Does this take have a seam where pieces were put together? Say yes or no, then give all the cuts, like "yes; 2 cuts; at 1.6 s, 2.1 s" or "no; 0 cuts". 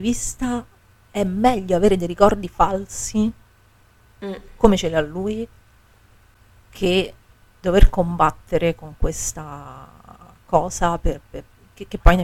no; 0 cuts